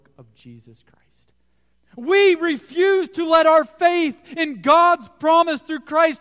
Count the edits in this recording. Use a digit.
1